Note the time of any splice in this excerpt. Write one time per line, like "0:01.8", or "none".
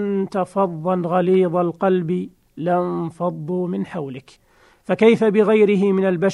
none

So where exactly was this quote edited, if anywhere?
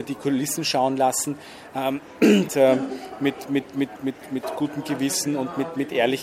0:02.5
0:04.0

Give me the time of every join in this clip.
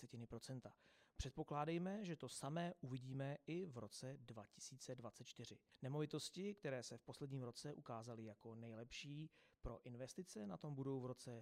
none

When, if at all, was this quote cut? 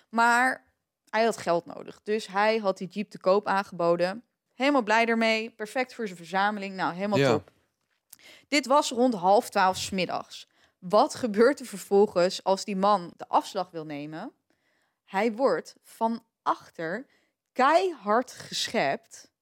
0:04.5
0:13.1

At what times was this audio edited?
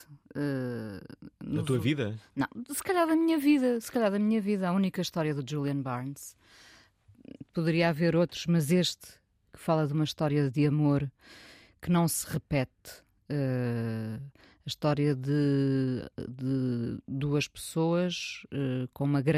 none

